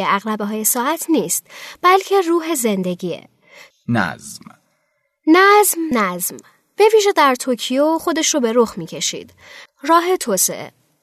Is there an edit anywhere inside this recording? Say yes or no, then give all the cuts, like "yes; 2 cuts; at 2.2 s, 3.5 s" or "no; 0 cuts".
yes; 3 cuts; at 3.7 s, 5.9 s, 9.7 s